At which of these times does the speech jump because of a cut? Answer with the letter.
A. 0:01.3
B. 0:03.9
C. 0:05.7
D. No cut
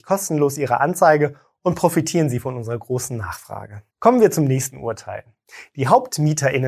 B